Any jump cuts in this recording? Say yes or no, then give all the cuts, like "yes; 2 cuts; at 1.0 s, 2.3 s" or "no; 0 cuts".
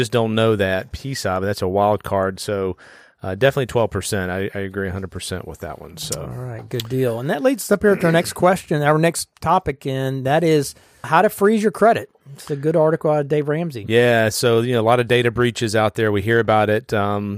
yes; 1 cut; at 11.0 s